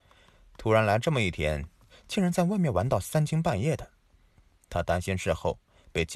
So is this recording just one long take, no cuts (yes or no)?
yes